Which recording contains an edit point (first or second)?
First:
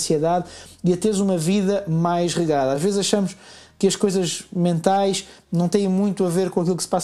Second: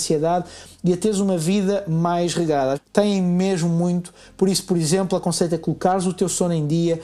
second